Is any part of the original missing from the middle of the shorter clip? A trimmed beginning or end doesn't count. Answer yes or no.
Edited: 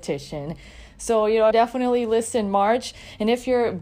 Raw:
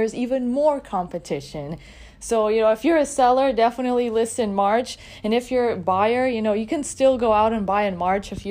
yes